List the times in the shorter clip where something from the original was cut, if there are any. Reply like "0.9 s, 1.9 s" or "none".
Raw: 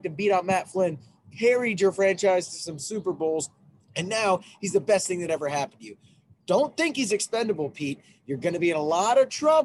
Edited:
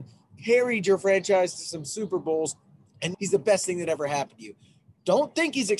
3.1 s

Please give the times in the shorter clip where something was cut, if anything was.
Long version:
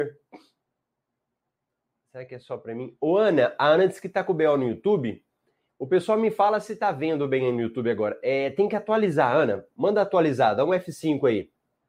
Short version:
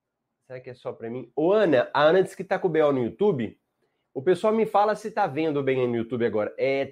none

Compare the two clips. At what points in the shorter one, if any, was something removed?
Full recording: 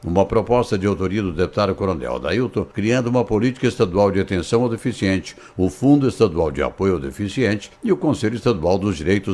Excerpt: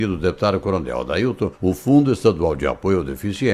1.5 s

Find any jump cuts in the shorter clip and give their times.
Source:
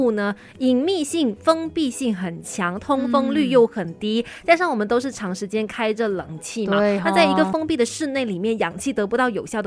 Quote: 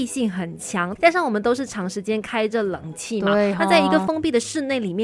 1.0 s

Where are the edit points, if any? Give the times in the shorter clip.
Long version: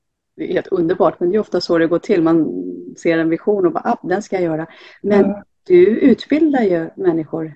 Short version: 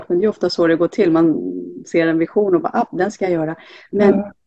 none

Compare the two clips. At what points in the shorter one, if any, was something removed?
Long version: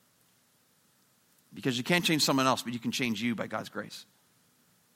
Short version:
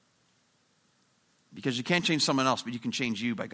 none

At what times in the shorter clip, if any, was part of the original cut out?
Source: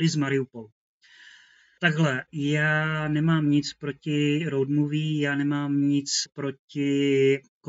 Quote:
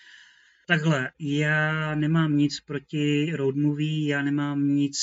none

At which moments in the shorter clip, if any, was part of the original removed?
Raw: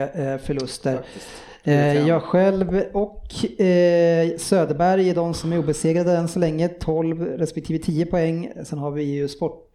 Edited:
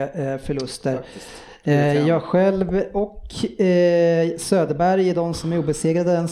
none

